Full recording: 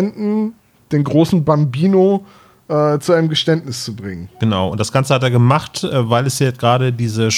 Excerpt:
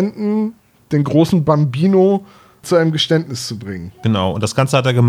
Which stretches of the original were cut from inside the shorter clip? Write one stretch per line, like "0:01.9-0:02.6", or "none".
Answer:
0:02.6-0:03.0